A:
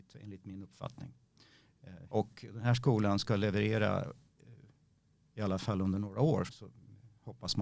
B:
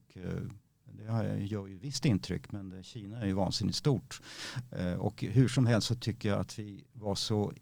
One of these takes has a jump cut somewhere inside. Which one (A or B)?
A